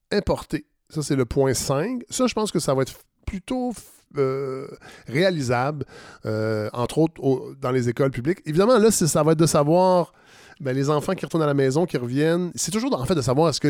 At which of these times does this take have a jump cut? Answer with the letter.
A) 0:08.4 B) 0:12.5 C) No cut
C